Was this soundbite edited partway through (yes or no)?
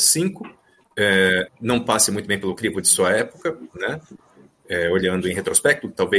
yes